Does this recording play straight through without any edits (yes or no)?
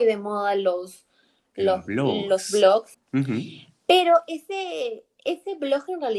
no